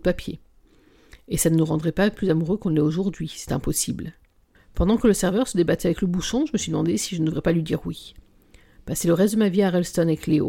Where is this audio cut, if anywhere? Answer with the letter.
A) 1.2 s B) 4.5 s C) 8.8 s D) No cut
B